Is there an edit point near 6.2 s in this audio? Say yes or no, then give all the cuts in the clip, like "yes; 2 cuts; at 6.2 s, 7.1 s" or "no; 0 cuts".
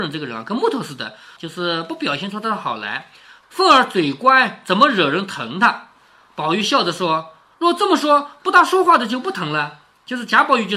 no; 1 cut; at 1.4 s